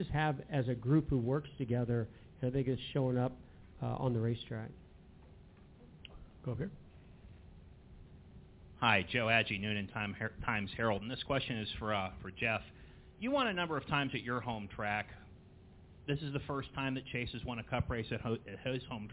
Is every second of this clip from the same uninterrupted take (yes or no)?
yes